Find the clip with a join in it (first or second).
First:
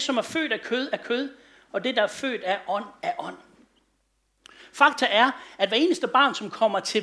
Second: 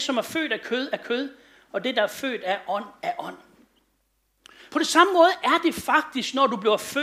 second